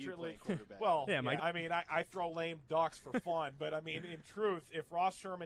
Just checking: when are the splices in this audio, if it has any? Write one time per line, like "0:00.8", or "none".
0:01.4